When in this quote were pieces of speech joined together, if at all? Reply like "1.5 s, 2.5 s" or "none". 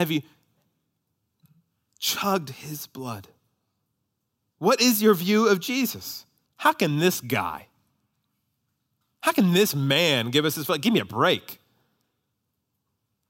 6.5 s